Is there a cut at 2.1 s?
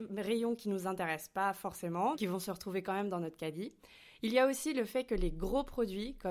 yes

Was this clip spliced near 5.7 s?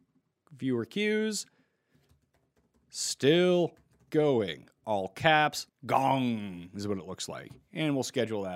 yes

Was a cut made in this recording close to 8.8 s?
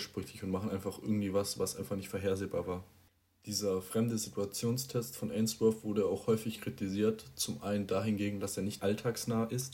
yes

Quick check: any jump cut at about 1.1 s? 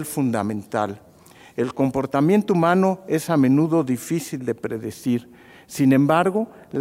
no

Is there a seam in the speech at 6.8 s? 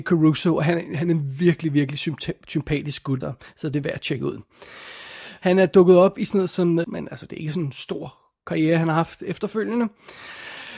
yes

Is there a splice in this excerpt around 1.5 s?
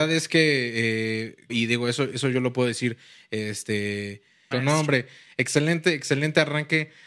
yes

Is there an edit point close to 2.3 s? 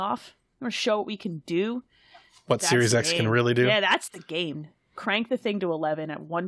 no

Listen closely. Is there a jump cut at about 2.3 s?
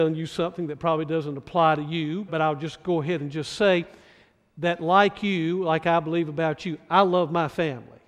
yes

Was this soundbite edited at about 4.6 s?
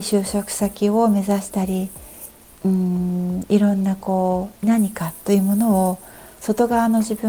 yes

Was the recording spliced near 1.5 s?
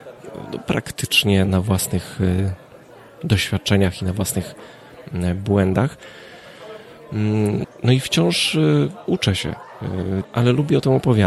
yes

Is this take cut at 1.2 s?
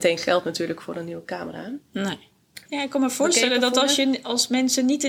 no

